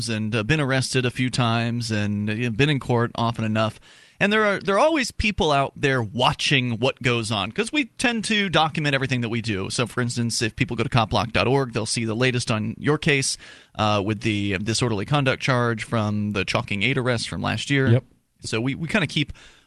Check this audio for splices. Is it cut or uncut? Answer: uncut